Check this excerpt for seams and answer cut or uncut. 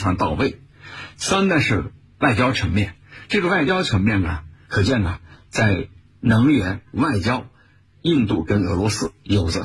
cut